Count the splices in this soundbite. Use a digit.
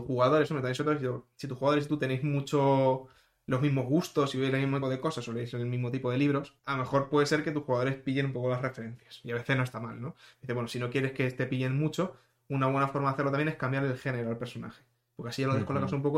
2